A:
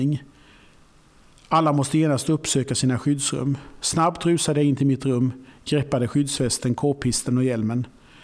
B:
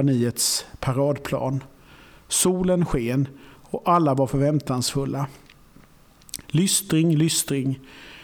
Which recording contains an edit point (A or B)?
B